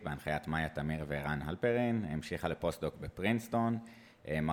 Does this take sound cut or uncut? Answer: uncut